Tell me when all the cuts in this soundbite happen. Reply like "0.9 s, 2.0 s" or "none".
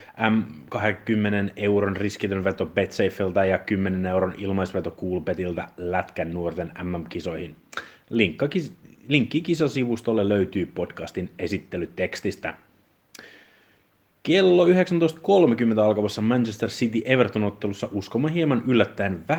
none